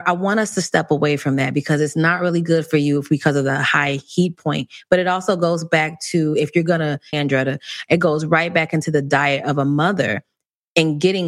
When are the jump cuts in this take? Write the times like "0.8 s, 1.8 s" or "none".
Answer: 7.1 s